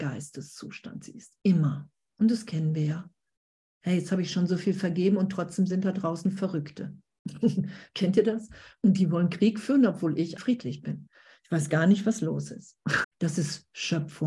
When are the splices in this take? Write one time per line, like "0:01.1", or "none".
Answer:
0:02.0
0:10.4
0:13.0